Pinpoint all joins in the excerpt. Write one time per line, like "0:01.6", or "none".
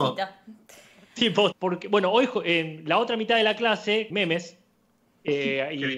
0:01.5
0:04.1